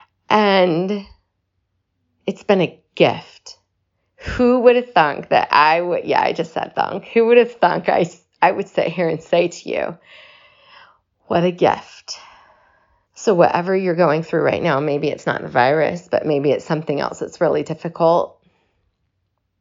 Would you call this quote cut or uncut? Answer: cut